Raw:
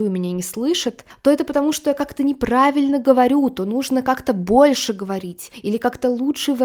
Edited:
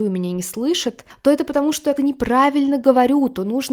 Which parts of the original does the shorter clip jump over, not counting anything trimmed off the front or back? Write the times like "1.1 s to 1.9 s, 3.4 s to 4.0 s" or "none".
2.0 s to 2.2 s